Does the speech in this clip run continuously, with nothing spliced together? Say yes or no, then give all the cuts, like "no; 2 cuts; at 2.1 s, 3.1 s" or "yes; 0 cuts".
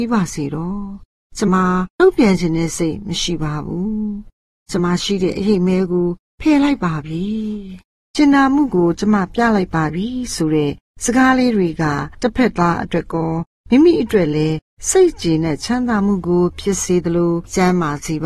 no; 2 cuts; at 1.5 s, 4.8 s